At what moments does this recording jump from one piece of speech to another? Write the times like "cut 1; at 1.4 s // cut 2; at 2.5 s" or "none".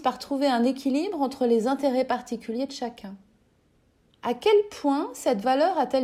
cut 1; at 4.2 s